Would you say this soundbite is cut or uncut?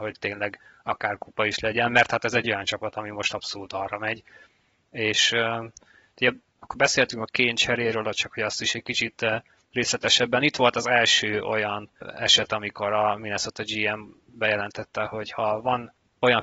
uncut